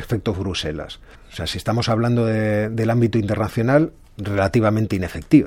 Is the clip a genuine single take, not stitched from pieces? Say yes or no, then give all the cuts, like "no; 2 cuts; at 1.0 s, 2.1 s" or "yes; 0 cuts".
no; 1 cut; at 1.1 s